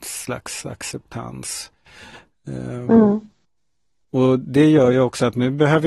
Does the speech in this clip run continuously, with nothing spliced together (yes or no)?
no